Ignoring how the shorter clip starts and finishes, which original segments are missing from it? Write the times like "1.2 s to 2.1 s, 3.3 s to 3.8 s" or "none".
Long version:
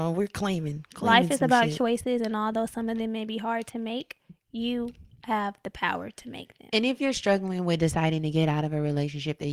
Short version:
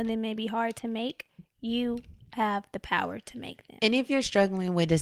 none